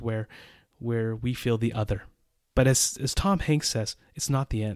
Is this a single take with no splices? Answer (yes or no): yes